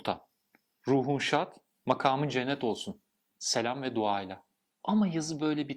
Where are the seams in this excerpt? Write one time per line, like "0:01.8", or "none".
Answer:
0:04.8